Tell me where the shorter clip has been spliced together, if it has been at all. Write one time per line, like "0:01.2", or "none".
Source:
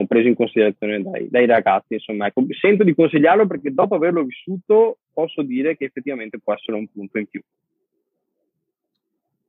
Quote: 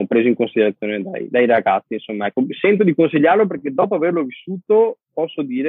none